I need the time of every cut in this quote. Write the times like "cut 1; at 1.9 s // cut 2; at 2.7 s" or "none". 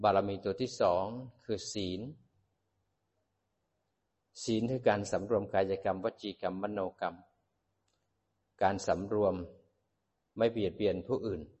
none